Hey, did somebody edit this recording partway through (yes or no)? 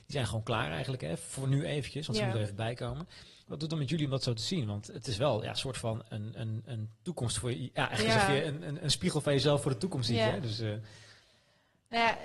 no